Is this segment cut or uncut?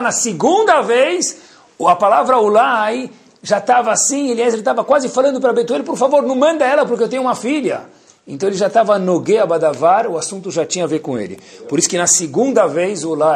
uncut